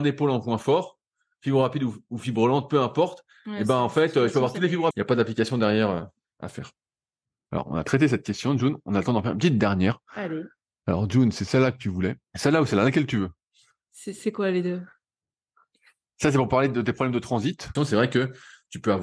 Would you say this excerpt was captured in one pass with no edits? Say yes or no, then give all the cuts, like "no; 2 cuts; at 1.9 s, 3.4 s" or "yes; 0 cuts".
no; 3 cuts; at 4.9 s, 12.2 s, 17.8 s